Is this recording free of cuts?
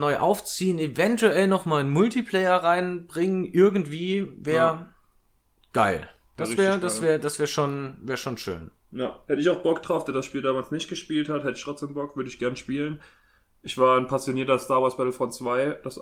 yes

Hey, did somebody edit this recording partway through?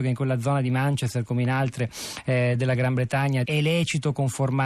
yes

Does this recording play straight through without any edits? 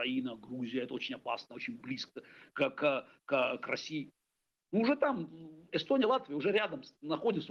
yes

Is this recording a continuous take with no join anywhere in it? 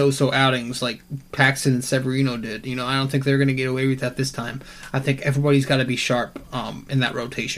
yes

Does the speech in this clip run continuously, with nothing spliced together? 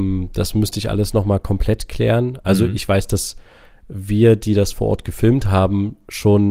yes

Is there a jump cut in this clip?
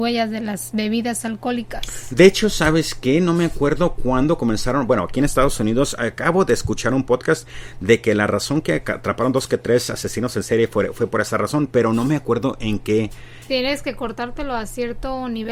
yes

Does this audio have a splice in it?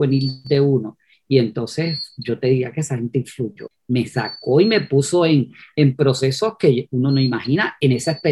yes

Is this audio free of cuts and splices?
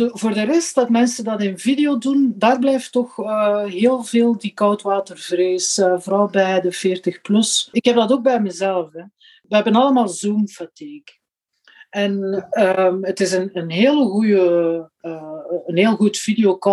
yes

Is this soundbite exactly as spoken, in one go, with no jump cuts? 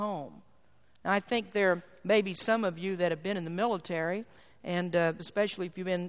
no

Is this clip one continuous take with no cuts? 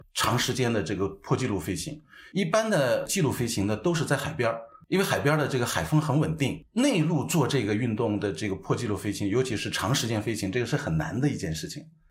yes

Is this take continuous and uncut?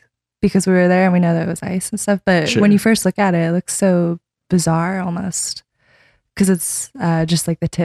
yes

